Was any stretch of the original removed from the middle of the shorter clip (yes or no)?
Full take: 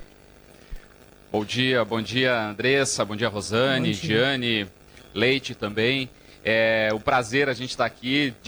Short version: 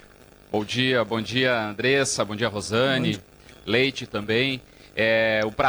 yes